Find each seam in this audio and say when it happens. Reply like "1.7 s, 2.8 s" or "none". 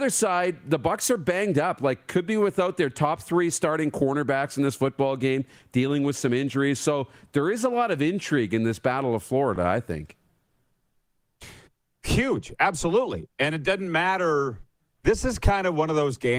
none